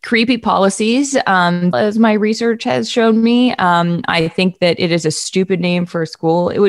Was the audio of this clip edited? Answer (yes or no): yes